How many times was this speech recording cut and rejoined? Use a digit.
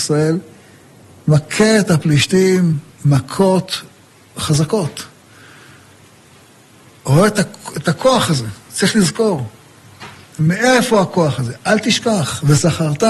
0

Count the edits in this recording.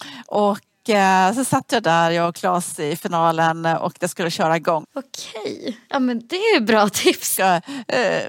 2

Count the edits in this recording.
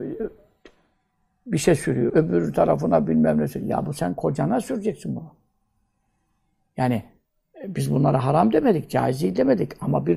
1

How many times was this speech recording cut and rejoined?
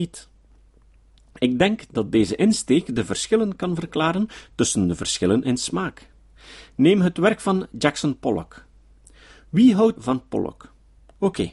1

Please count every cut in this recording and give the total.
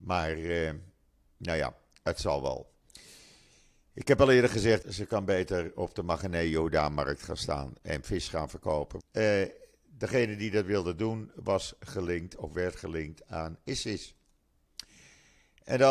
2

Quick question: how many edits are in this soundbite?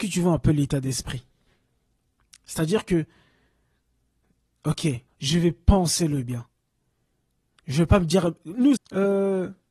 2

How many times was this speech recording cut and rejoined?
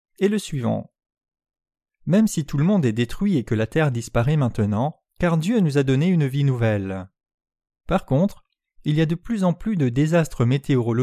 2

